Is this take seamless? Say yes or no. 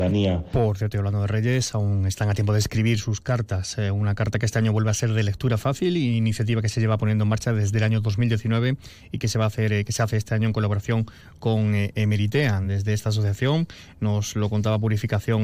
yes